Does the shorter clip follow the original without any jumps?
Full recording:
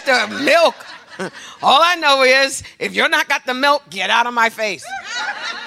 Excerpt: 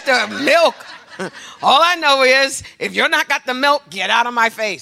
yes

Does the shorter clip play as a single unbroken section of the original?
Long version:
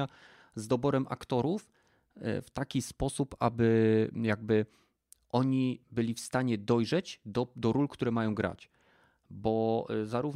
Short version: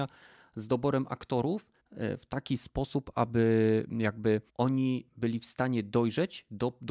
no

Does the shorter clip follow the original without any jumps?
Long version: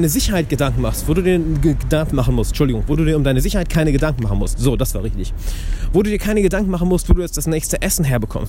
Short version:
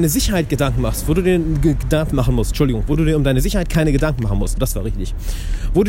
no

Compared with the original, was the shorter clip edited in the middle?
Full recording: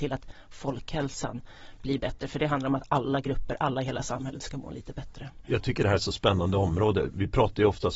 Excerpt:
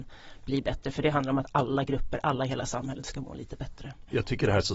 no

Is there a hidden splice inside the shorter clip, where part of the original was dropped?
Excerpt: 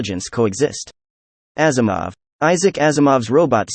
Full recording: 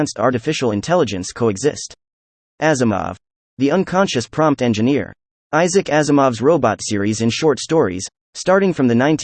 yes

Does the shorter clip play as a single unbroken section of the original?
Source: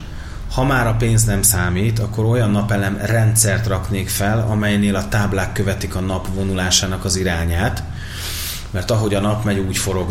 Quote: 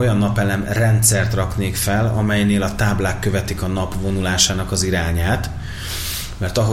yes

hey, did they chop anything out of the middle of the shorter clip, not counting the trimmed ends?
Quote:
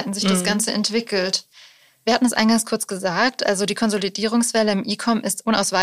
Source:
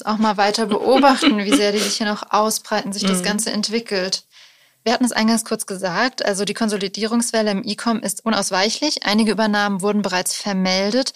no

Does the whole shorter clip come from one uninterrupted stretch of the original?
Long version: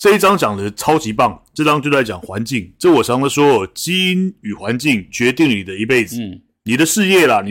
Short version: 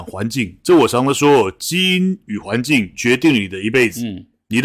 yes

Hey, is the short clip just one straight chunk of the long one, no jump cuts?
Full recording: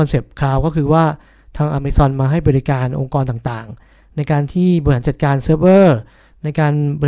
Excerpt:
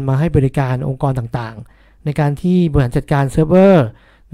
yes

